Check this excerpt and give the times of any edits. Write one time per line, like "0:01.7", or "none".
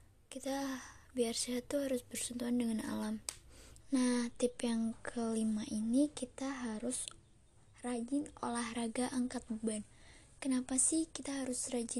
0:03.8